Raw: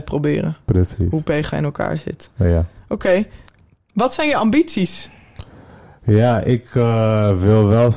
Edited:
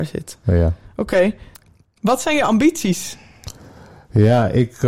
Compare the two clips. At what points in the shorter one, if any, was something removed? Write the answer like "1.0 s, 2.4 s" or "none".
none